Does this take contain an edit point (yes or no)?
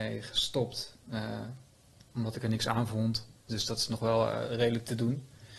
yes